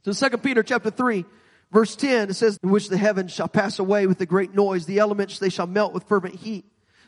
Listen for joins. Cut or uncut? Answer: cut